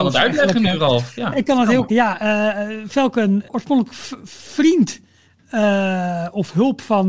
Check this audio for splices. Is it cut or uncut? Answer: cut